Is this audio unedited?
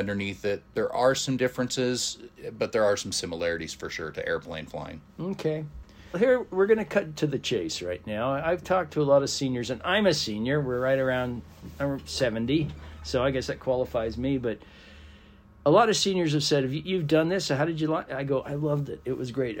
no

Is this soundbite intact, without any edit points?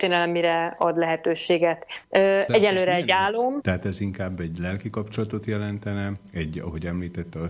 no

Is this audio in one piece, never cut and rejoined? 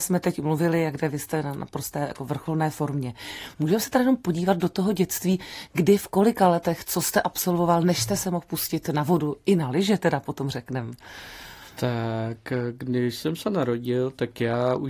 yes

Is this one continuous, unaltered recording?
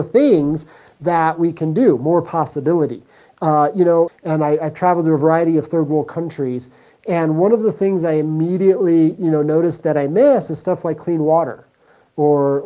no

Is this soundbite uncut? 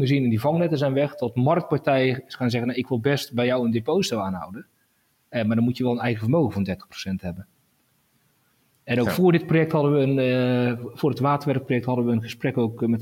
yes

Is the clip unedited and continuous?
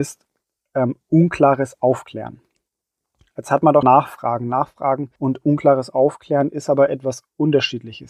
no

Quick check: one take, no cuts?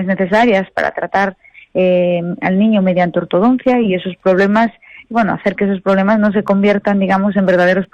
yes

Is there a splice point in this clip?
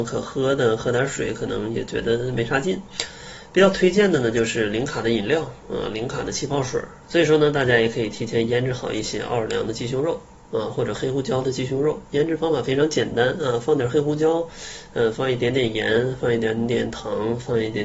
yes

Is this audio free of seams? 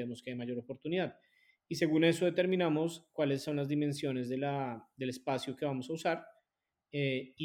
yes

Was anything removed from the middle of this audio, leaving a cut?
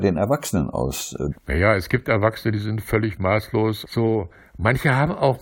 yes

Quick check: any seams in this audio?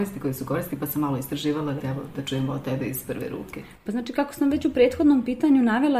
no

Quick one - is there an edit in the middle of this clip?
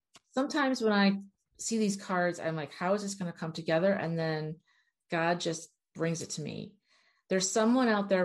no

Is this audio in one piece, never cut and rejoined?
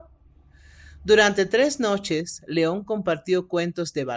yes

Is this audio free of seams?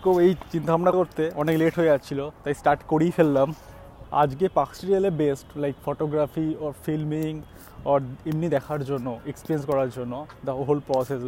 no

